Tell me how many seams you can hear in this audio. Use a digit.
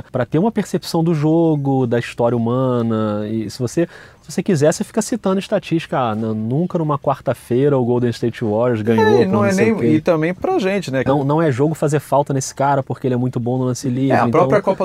1